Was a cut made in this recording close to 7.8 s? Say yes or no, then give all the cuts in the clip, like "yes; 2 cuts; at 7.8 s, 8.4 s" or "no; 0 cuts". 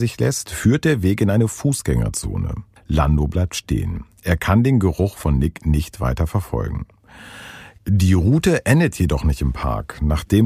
yes; 2 cuts; at 2.8 s, 7.8 s